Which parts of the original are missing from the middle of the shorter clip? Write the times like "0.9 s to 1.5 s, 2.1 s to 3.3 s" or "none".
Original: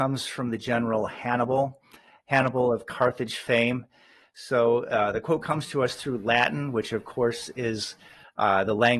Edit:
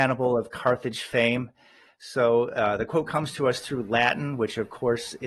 none